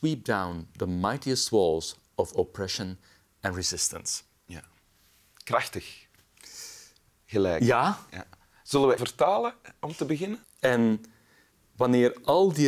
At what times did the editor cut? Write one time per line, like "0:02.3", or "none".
0:09.0
0:10.4